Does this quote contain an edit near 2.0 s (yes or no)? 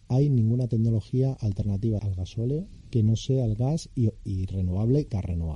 yes